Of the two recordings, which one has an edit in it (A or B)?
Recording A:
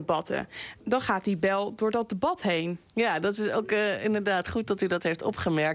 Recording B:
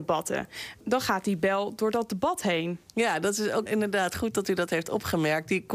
B